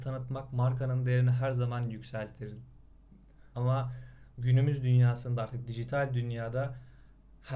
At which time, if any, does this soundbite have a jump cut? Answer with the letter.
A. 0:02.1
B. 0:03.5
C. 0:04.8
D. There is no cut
B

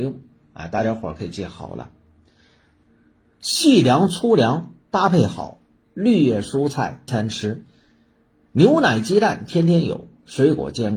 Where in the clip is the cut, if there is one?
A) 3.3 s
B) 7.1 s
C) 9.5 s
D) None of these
B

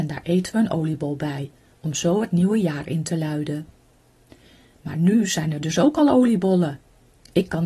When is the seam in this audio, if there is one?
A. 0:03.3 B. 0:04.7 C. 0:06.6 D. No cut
D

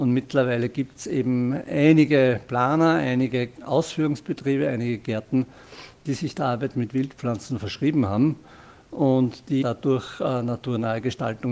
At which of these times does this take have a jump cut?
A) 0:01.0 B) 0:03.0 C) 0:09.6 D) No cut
C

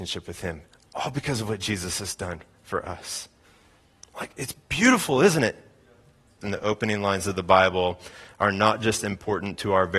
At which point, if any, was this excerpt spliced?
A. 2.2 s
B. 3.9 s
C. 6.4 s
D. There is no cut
C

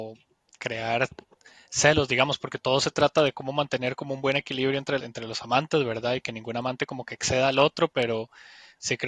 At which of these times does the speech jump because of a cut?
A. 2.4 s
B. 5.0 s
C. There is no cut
B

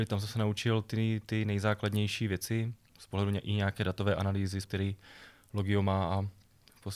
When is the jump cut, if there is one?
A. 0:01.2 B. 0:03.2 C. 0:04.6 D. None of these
C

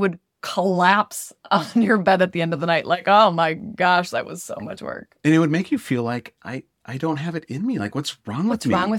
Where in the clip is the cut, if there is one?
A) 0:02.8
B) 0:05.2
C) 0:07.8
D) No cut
D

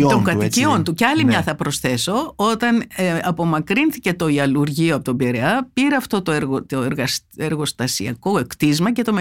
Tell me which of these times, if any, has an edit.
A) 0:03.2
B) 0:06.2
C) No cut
C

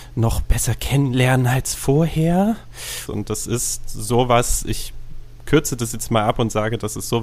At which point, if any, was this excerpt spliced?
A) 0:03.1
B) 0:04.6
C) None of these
A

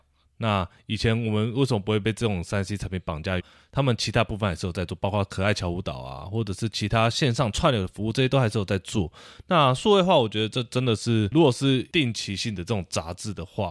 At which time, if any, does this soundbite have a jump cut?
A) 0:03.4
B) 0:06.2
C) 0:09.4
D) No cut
A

